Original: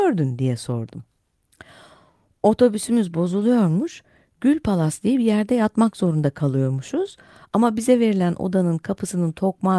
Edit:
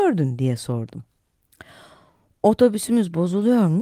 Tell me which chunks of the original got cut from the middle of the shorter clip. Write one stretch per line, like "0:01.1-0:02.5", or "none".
none